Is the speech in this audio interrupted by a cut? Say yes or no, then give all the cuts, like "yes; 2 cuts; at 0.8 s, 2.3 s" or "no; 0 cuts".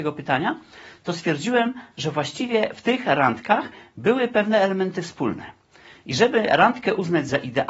no; 0 cuts